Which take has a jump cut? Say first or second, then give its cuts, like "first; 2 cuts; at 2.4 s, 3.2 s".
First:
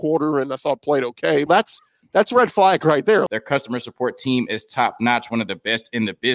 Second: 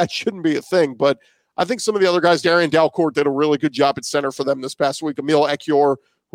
first; 2 cuts; at 1.5 s, 3.3 s